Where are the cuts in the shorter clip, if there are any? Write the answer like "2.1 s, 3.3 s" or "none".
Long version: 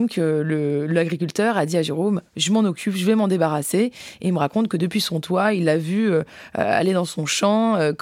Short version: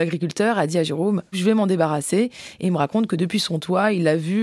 1.3 s

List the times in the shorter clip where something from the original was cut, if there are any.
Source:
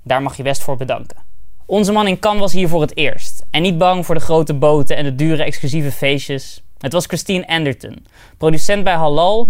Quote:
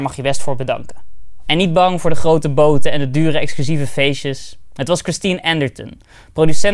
1.5 s

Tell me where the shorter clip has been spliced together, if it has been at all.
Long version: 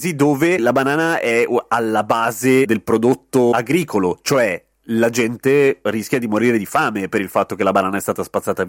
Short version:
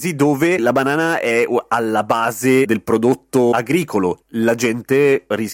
4.2 s

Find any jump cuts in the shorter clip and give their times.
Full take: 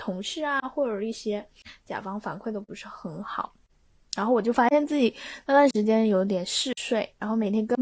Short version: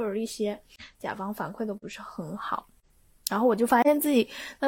none

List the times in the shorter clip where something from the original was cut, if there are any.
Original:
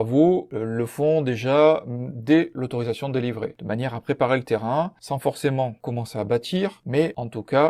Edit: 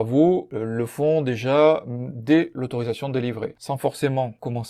3.6 s

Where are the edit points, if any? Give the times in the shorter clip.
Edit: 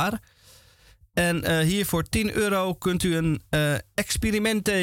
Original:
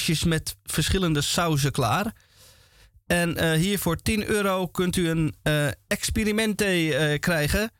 none

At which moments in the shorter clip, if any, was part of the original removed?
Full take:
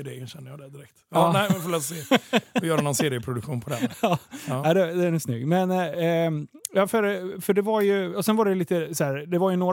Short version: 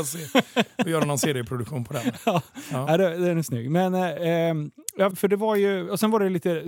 5.1 s

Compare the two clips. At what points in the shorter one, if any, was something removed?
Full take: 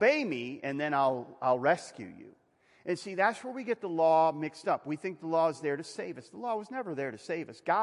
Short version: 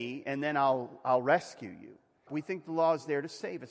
2.3 s

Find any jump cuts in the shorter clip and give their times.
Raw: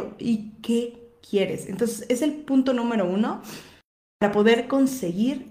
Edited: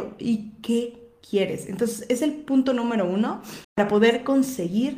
3.6 s

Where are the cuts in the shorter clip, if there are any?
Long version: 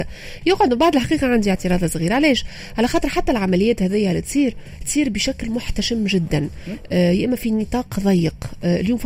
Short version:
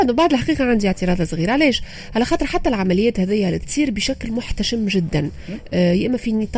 3.6 s

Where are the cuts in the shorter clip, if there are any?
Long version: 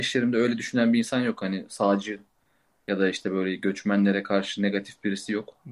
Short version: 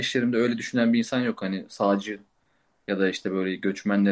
none

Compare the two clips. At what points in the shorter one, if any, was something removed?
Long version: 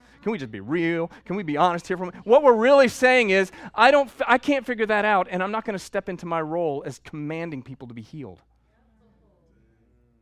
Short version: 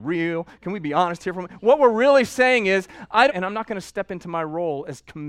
3.3 s

